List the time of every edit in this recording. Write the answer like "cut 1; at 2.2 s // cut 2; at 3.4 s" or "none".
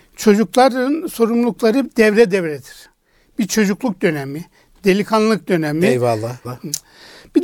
cut 1; at 6.4 s